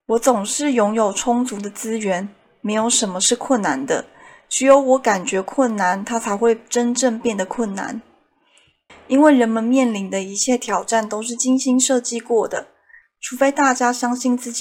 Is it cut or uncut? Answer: cut